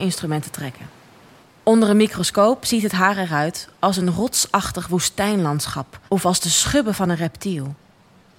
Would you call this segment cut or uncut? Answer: cut